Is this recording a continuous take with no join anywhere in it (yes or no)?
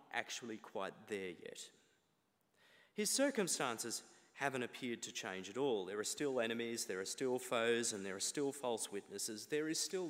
yes